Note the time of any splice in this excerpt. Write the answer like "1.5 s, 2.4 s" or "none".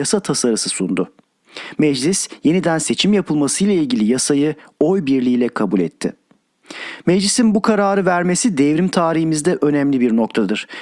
none